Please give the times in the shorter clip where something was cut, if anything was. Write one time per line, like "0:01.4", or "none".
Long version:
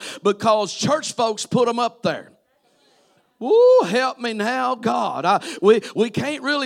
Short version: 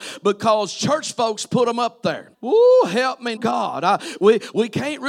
0:02.3
0:03.4